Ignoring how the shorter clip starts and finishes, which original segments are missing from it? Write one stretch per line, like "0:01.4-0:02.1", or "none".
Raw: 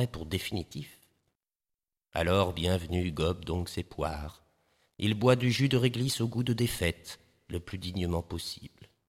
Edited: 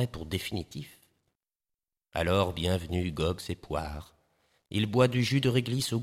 0:03.4-0:03.7